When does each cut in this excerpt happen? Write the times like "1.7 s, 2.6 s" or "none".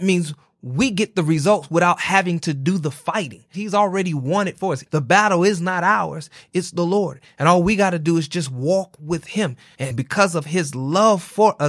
3.5 s